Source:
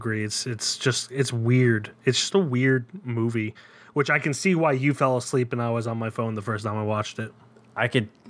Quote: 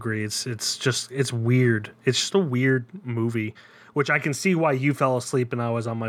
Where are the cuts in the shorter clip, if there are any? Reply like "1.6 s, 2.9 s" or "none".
none